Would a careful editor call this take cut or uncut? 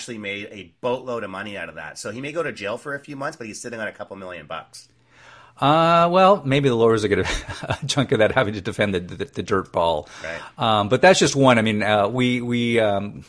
uncut